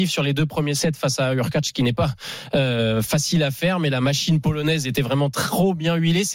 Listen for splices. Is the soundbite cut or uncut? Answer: uncut